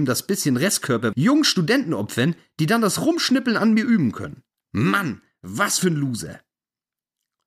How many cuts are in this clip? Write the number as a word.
two